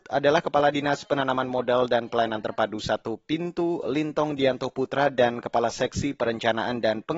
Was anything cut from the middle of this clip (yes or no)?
no